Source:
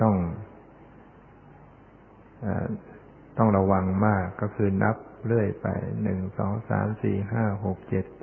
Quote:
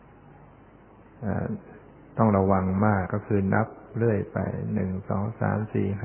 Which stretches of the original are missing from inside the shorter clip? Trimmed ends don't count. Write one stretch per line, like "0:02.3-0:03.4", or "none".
0:04.3-0:04.3